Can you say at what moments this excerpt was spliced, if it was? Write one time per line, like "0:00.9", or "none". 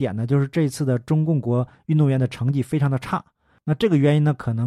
none